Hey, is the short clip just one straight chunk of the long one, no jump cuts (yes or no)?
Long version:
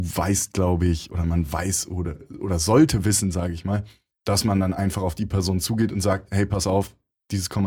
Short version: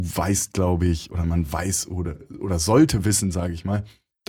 yes